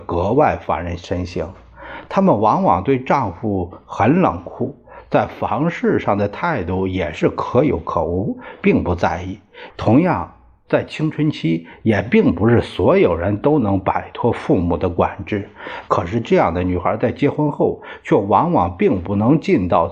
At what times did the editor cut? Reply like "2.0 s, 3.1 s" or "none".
9.7 s, 15.9 s